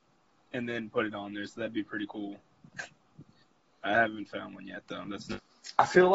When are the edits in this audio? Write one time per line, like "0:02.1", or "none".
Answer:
none